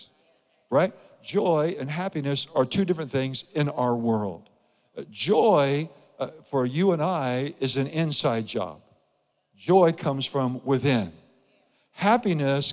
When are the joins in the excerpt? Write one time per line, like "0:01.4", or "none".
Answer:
none